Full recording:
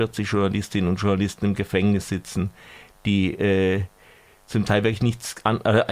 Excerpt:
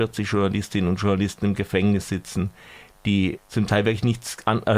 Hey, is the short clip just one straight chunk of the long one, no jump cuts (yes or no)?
no